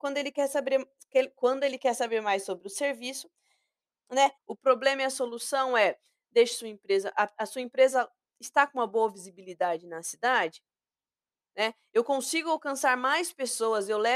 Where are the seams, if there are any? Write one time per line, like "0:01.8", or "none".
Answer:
0:04.4